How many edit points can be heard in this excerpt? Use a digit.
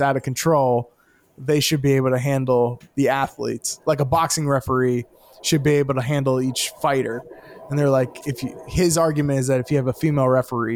0